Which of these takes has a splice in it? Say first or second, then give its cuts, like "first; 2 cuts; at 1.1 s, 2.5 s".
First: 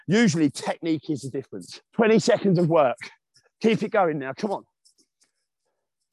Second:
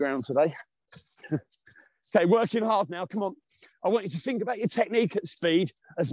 first; 1 cut; at 1.9 s